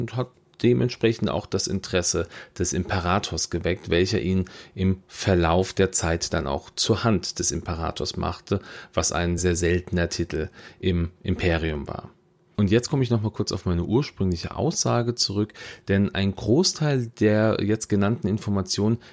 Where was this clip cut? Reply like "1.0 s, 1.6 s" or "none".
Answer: 9.4 s, 12.5 s, 15.8 s